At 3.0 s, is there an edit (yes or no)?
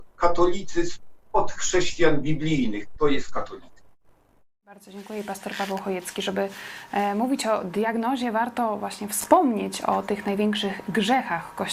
yes